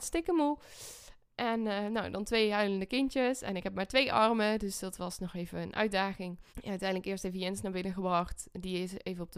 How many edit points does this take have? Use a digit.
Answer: 1